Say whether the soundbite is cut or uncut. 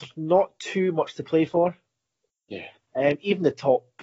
uncut